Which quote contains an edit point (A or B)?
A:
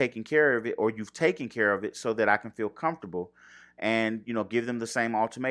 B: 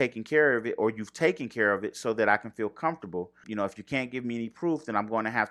B